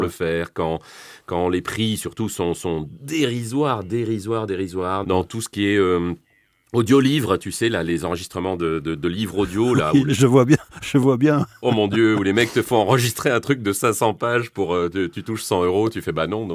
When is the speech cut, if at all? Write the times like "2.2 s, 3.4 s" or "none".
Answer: 5.0 s